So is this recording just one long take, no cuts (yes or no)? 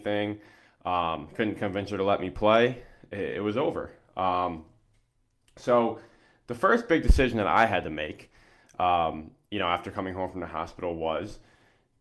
yes